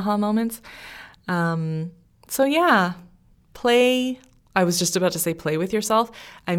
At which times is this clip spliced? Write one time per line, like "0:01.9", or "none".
none